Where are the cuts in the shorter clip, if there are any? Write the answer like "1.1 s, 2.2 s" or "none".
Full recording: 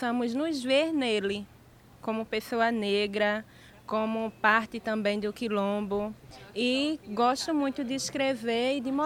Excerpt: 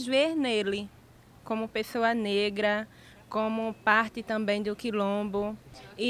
none